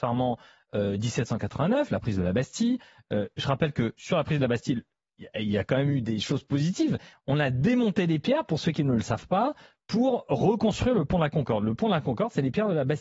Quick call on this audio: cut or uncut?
uncut